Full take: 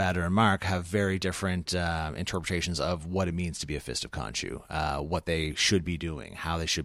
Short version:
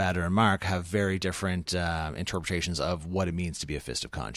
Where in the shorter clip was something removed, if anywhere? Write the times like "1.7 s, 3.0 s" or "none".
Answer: none